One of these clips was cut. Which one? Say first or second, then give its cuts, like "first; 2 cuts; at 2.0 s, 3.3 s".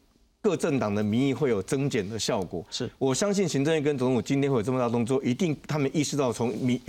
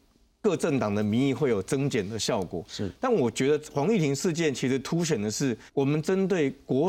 second; 2 cuts; at 2.7 s, 5.7 s